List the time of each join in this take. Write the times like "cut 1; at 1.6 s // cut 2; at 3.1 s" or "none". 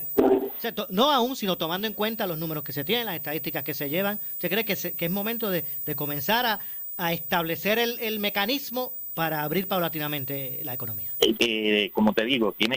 cut 1; at 11.4 s